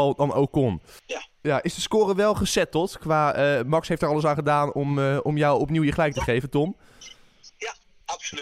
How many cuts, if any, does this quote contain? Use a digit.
0